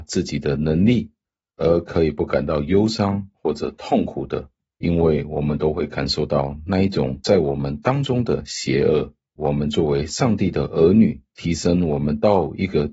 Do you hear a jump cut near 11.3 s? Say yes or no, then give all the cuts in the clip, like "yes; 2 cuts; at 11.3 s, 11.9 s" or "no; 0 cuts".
yes; 2 cuts; at 9.4 s, 11.3 s